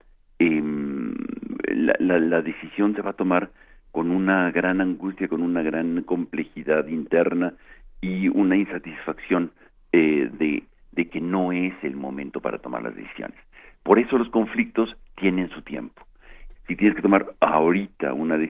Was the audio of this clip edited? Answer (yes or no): yes